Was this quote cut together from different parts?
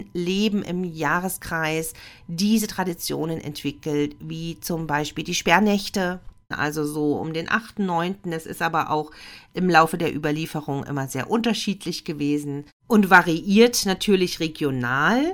yes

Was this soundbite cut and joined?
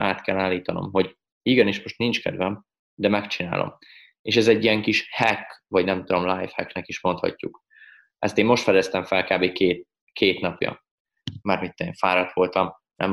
yes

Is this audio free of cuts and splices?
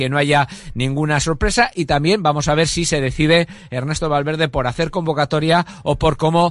yes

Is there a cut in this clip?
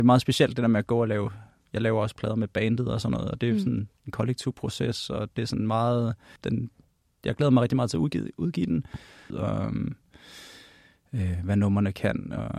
yes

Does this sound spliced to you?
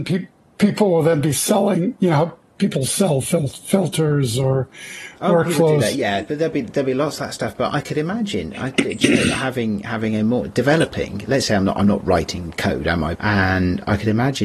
yes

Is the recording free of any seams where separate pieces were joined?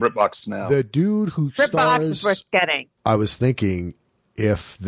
no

